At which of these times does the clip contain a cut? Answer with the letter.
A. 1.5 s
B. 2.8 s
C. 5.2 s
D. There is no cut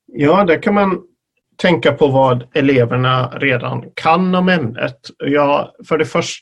D